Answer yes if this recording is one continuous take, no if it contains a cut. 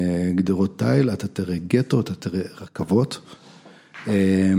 yes